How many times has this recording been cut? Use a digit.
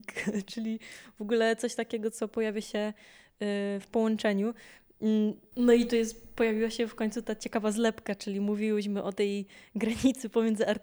1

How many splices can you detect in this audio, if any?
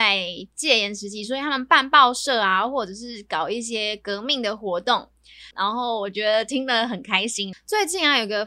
2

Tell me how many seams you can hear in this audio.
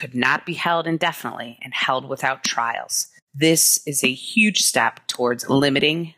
0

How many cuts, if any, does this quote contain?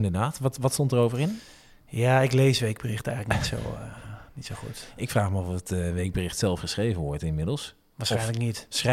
0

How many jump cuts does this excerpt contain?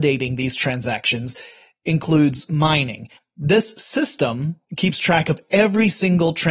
2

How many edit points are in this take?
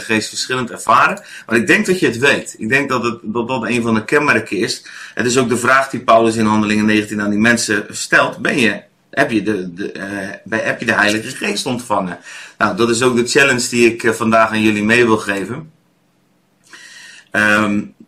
0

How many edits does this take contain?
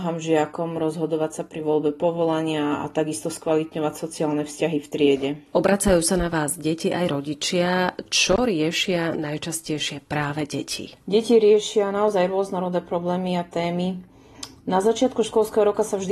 0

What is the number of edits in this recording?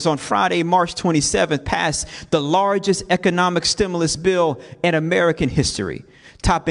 0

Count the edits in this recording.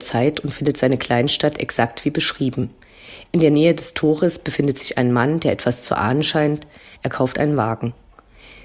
1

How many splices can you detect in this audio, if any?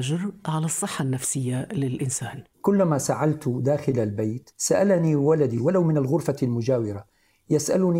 2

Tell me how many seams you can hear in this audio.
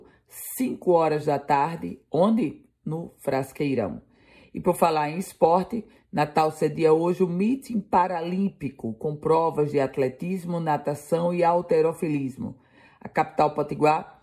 0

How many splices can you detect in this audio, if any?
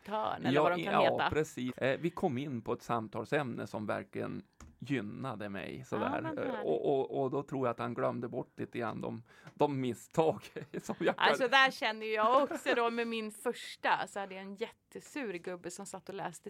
1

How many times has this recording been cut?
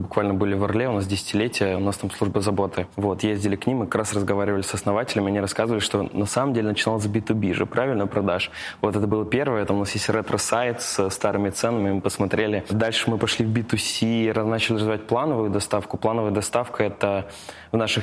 0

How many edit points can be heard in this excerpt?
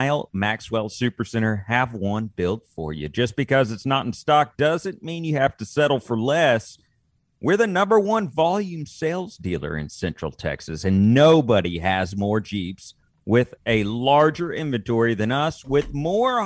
0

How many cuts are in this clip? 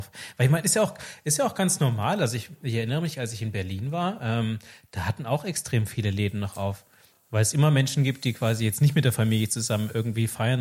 0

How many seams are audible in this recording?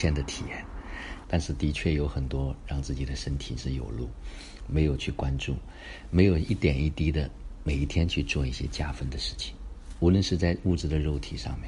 1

